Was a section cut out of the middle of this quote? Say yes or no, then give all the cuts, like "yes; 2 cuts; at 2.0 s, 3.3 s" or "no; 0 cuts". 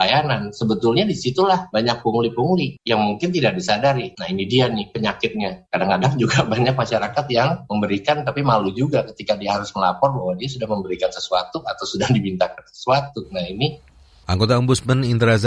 yes; 1 cut; at 4.1 s